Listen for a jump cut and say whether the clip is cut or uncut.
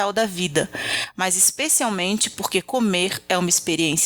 cut